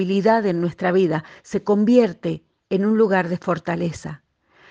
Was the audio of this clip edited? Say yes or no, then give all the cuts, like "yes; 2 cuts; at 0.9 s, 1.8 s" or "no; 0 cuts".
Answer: no; 0 cuts